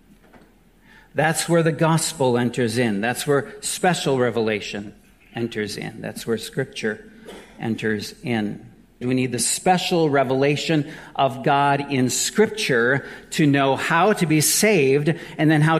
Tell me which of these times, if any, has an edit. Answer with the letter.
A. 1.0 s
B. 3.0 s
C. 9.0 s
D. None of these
C